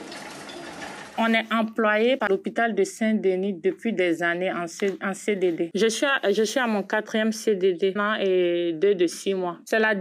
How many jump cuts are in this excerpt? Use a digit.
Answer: 1